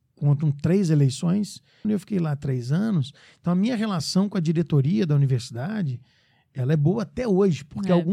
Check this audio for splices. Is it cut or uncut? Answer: cut